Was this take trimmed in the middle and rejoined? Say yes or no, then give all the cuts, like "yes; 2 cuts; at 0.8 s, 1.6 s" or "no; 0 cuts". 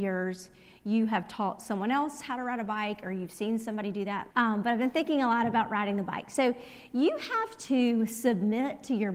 yes; 1 cut; at 4.3 s